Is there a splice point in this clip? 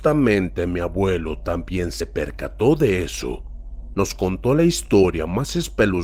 yes; 1 cut; at 3.9 s

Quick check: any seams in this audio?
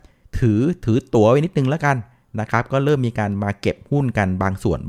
no; 0 cuts

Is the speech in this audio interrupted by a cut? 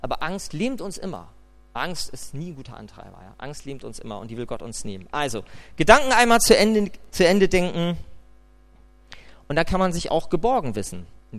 no; 0 cuts

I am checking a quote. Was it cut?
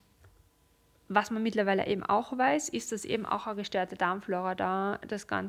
no; 0 cuts

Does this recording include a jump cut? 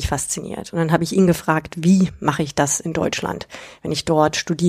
no; 0 cuts

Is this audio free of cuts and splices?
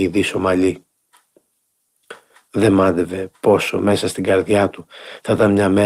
no; 1 cut; at 2.4 s

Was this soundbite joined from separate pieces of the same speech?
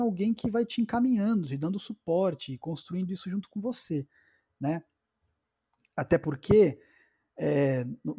no; 0 cuts

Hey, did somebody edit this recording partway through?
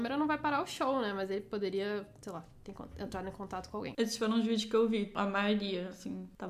no; 0 cuts

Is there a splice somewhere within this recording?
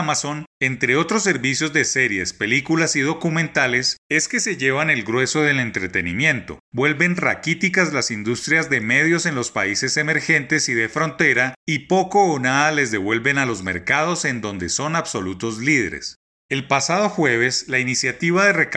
no; 0 cuts

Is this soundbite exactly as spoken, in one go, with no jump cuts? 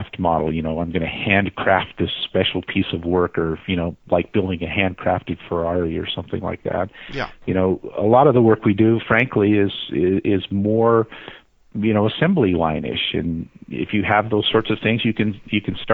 yes; 0 cuts

